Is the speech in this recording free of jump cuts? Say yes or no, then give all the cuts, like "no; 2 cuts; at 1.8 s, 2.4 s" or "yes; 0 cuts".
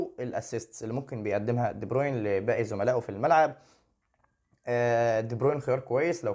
yes; 0 cuts